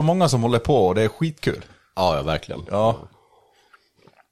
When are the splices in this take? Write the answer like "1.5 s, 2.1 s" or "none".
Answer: none